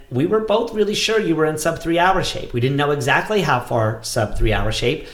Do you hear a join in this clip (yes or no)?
no